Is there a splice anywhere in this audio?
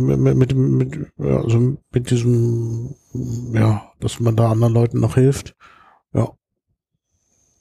no; 0 cuts

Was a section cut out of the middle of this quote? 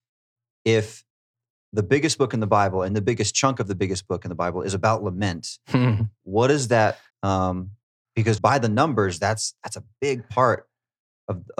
yes; 2 cuts; at 7.1 s, 8.4 s

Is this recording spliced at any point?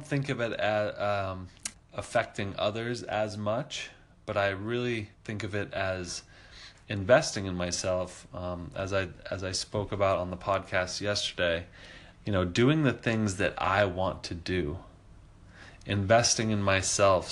yes; 3 cuts; at 1.7 s, 5.1 s, 12.1 s

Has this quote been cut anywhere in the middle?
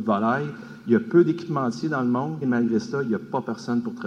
yes; 1 cut; at 2.4 s

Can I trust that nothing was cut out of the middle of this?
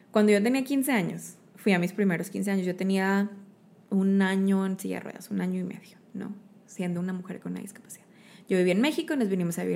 yes; 0 cuts

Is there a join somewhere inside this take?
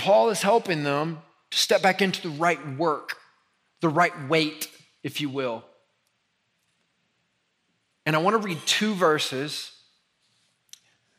no; 0 cuts

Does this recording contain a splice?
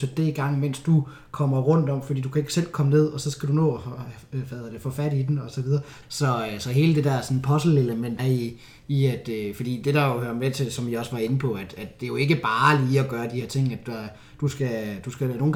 yes; 2 cuts; at 6.0 s, 8.2 s

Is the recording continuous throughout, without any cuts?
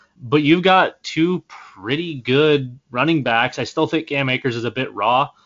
yes; 0 cuts

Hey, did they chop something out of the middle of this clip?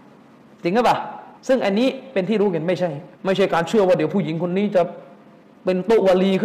yes; 2 cuts; at 1.4 s, 3.1 s

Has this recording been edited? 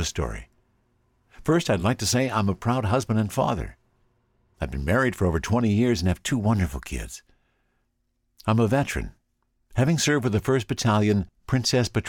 no; 0 cuts

